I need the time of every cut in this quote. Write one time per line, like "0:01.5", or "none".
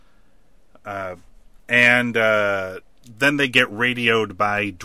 0:01.6